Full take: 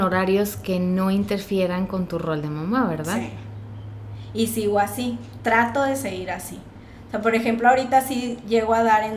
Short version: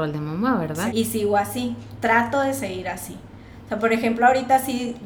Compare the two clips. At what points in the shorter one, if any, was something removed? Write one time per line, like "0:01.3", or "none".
0:00.9